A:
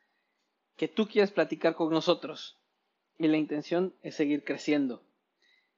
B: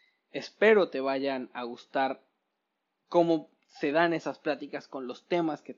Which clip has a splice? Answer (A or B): A